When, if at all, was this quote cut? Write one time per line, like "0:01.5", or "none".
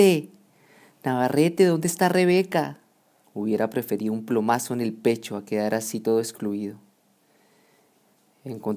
0:03.2